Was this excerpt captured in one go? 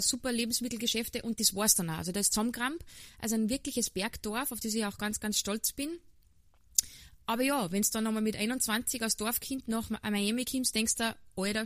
yes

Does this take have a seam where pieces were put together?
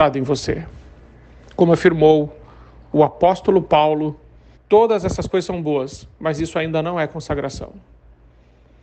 yes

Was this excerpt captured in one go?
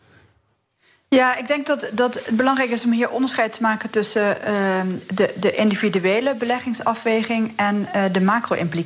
yes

